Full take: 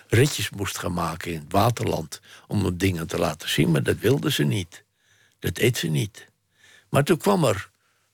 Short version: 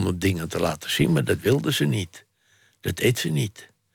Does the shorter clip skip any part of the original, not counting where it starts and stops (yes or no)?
no